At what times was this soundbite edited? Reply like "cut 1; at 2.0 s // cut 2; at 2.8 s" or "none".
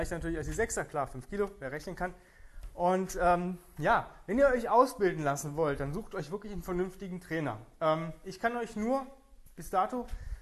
none